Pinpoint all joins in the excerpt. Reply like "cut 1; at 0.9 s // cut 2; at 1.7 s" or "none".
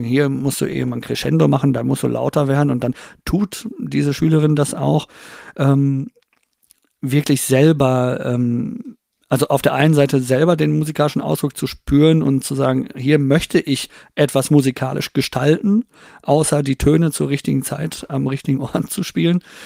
none